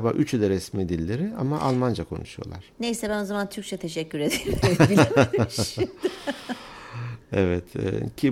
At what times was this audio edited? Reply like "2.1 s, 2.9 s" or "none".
none